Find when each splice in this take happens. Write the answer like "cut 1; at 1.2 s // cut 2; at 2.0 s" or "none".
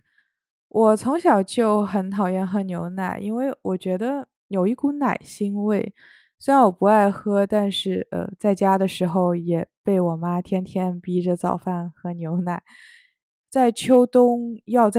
cut 1; at 13.4 s